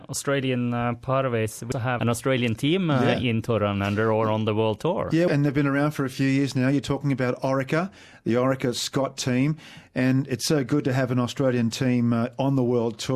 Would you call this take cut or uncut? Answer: cut